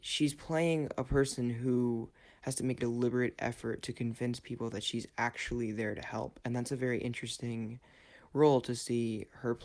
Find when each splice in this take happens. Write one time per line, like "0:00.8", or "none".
0:02.8